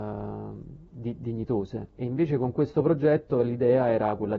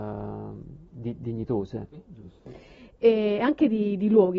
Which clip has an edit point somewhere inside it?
second; 1 cut; at 1.9 s

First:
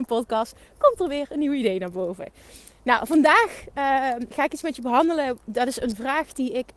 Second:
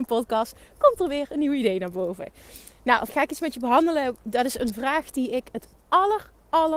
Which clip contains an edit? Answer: second; 1 cut; at 3.1 s

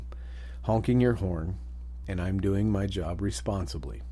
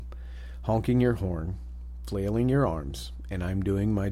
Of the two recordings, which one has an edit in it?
first; 1 cut; at 2.0 s

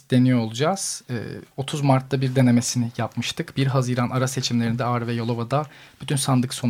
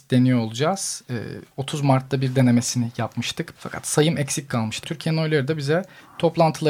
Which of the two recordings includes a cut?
second; 2 cuts; at 3.6 s, 4.8 s

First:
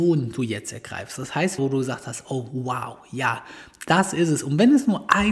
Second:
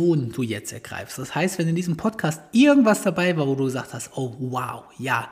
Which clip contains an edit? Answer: first; 1 cut; at 1.6 s

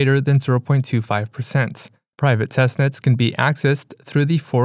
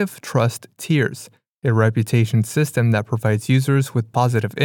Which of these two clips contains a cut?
first; 1 cut; at 2.1 s

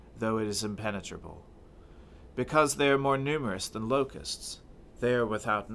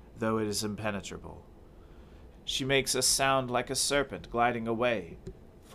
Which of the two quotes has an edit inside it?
second; 1 cut; at 2.3 s

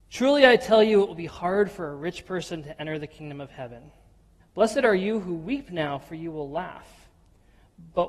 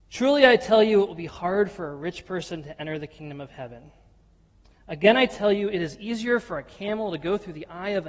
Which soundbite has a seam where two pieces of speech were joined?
first; 1 cut; at 4.4 s

